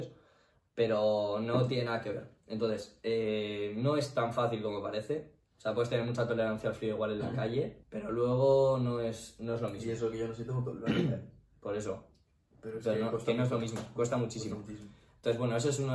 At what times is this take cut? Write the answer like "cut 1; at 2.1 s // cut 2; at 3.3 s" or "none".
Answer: cut 1; at 7.8 s

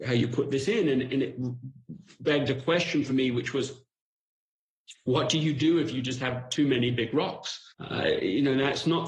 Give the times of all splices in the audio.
cut 1; at 7.7 s

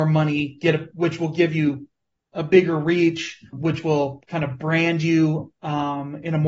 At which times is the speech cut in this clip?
cut 1; at 3.5 s

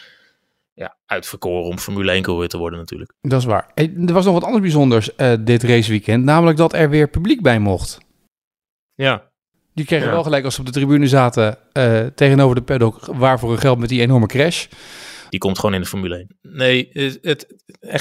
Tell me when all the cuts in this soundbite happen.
cut 1; at 15.3 s // cut 2; at 16.3 s

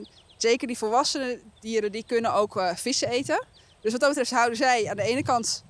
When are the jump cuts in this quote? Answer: none

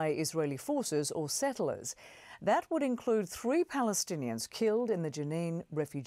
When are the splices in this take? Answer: none

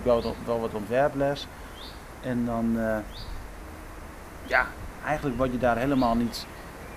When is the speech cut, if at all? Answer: none

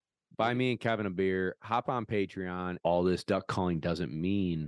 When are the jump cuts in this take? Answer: cut 1; at 2.8 s

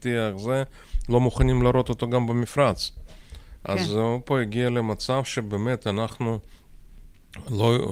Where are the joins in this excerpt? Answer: none

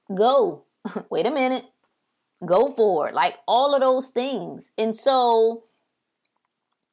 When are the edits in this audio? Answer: cut 1; at 1.1 s

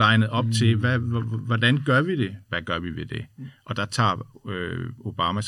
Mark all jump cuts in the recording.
cut 1; at 2.5 s

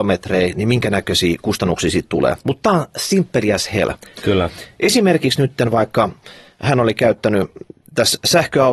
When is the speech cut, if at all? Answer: cut 1; at 2.4 s // cut 2; at 4.1 s

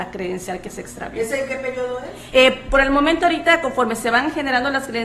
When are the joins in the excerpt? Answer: cut 1; at 2.3 s

